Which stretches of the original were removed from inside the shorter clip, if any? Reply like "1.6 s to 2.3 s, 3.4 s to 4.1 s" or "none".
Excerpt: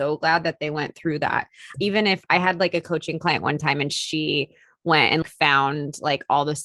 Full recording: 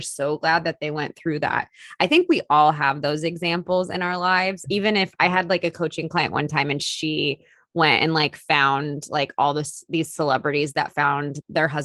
1.9 s to 4.6 s, 8.1 s to 8.3 s